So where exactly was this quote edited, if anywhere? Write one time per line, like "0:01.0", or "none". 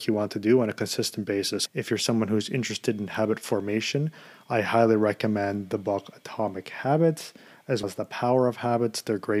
0:01.7
0:07.8